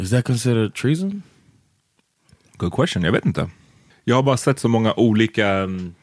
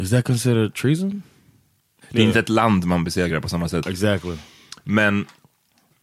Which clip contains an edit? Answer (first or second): second